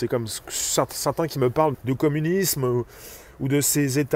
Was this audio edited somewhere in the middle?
yes; 1 cut; at 1.7 s

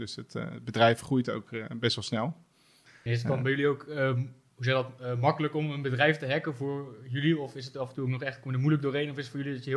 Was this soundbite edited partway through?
no; 0 cuts

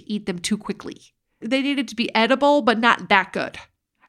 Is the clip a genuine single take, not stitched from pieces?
no; 1 cut; at 1.4 s

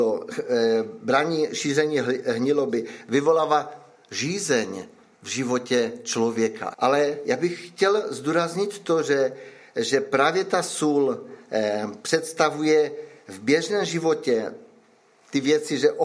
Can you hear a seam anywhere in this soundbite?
yes; 1 cut; at 6.7 s

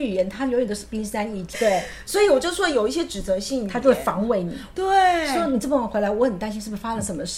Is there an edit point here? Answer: yes; 2 cuts; at 1.5 s, 4.7 s

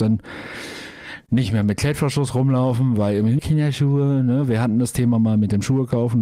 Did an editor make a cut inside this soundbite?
yes; 1 cut; at 3.4 s

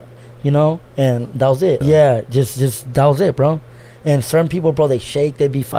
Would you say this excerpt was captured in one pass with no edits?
no; 1 cut; at 1.8 s

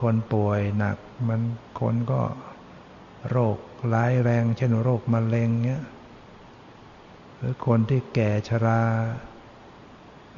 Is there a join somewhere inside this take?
no; 0 cuts

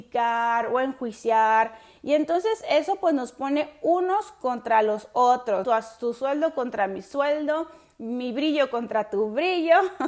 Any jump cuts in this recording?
yes; 1 cut; at 5.6 s

